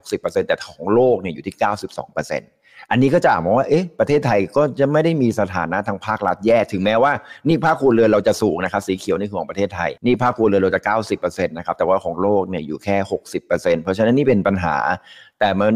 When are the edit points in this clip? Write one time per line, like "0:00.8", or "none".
0:10.0